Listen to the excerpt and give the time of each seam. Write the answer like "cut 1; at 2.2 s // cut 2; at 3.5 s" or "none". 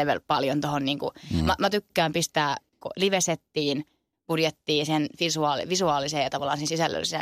none